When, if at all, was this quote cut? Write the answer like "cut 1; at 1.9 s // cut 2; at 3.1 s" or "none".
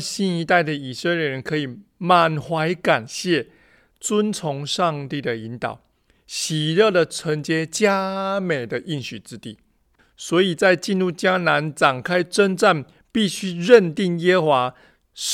cut 1; at 10.0 s // cut 2; at 13.0 s